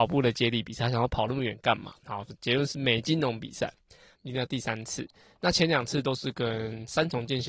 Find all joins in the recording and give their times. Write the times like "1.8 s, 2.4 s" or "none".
4.2 s